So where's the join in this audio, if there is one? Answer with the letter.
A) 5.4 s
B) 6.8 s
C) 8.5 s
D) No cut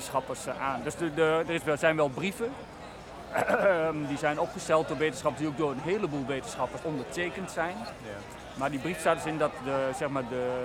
B